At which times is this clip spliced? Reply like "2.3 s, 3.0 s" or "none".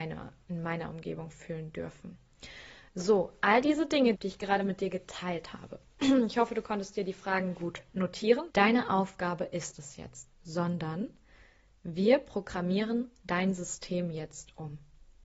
4.1 s, 8.5 s, 10.3 s